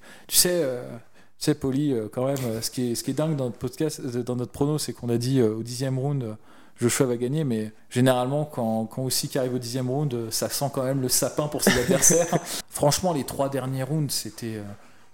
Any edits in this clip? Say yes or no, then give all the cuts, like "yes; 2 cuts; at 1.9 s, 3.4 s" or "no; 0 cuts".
yes; 2 cuts; at 7.8 s, 12.6 s